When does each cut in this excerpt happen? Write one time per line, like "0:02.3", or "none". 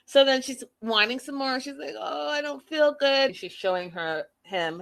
0:03.3